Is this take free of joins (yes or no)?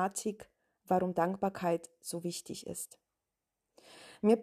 yes